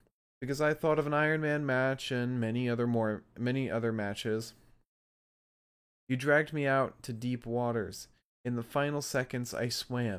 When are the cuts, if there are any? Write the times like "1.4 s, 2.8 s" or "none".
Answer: 5.9 s

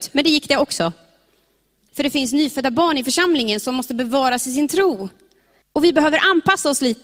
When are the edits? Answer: 1.9 s, 5.6 s

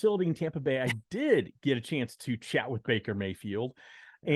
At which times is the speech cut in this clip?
none

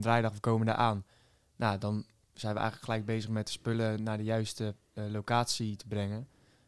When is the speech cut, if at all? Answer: none

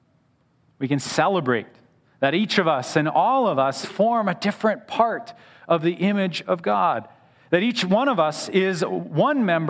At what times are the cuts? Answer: 3.8 s

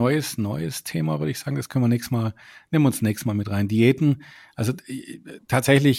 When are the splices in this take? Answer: none

